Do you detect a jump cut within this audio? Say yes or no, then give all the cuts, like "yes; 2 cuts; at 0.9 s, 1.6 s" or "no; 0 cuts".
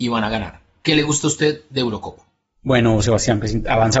no; 0 cuts